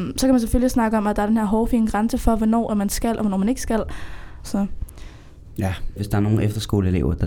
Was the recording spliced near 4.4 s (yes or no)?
yes